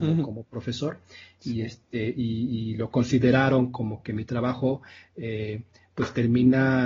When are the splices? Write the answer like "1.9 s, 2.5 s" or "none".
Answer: none